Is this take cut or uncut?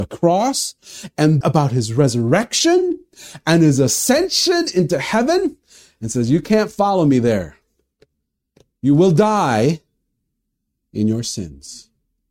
cut